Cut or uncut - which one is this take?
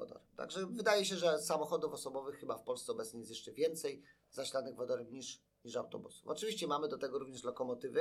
uncut